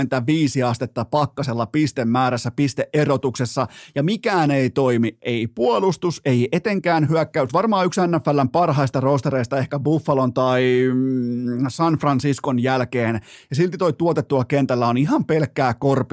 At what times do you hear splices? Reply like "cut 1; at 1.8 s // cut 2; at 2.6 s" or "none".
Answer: cut 1; at 7.5 s